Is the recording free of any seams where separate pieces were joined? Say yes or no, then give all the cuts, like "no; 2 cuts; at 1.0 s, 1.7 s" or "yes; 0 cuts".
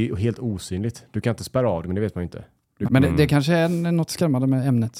no; 2 cuts; at 1.8 s, 2.8 s